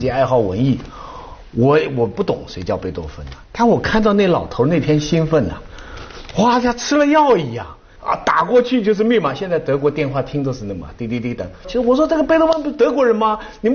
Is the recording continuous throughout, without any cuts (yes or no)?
no